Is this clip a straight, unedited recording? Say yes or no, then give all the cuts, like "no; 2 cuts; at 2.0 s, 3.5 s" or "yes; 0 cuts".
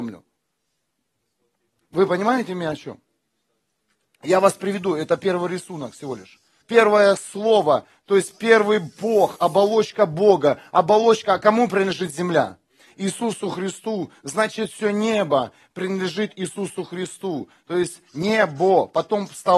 no; 1 cut; at 6.6 s